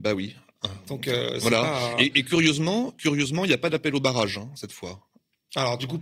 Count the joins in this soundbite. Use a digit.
0